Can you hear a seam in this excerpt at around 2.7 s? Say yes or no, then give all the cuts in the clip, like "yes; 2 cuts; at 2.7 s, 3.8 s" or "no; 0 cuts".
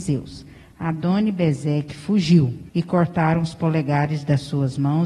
yes; 1 cut; at 2.7 s